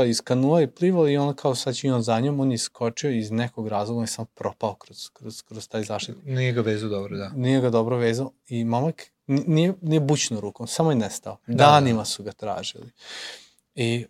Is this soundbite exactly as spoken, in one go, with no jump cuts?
yes; 0 cuts

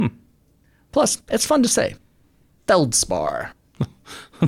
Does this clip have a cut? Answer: no; 0 cuts

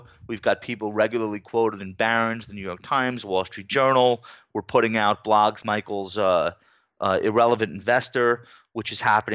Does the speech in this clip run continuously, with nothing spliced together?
no; 1 cut; at 5.6 s

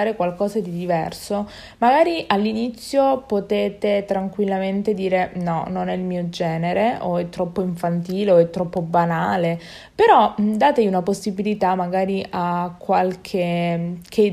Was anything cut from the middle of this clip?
no; 0 cuts

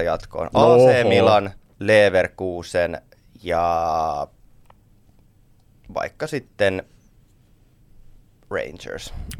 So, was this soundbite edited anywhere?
yes; 1 cut; at 1.7 s

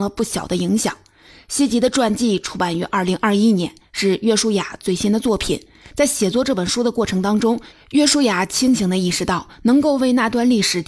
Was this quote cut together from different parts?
no; 0 cuts

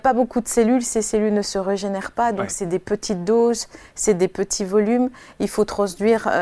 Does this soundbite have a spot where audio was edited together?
no; 0 cuts

